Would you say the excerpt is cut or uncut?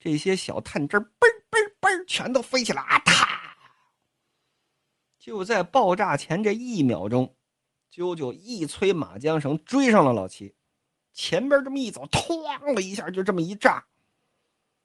cut